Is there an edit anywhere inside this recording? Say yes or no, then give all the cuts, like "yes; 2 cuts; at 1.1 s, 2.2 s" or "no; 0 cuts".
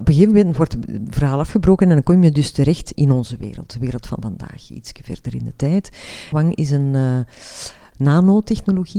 yes; 3 cuts; at 2.9 s, 6.3 s, 7.9 s